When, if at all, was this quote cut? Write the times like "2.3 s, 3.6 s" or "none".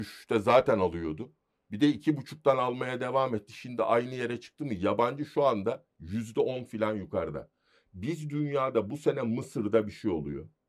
none